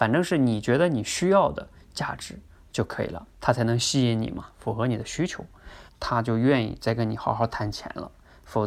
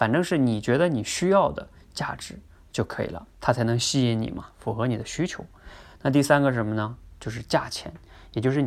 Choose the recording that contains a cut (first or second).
first